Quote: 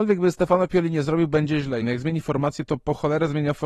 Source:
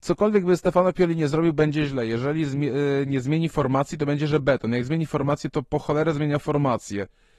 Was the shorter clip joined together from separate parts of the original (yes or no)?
yes